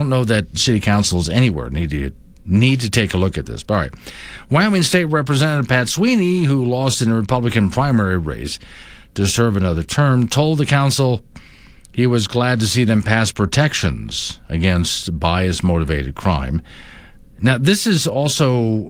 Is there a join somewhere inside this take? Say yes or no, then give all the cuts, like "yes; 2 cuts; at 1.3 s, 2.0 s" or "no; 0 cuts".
no; 0 cuts